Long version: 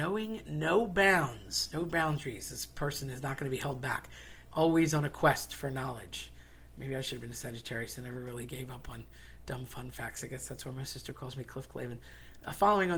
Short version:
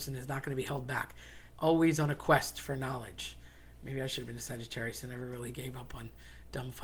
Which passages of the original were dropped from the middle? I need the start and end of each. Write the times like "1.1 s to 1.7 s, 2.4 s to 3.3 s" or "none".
none